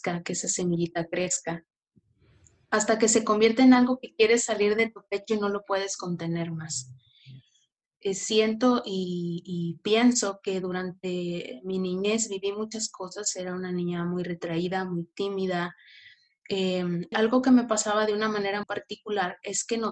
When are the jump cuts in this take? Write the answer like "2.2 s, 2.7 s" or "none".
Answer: 17.1 s, 18.6 s